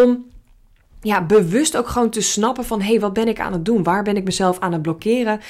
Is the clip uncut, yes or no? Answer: yes